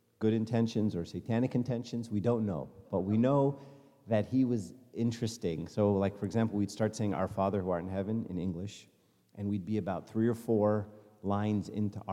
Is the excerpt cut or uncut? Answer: uncut